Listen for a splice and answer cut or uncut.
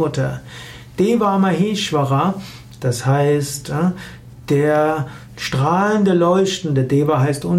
uncut